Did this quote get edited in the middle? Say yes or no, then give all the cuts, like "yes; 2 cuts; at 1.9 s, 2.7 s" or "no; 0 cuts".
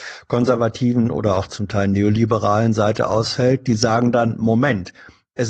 no; 0 cuts